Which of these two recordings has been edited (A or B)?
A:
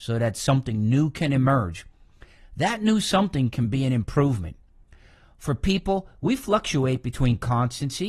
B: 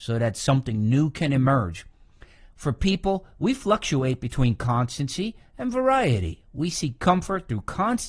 B